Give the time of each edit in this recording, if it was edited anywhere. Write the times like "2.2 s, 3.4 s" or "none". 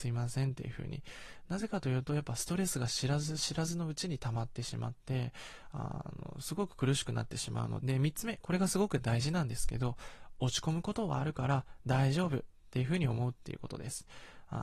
7.8 s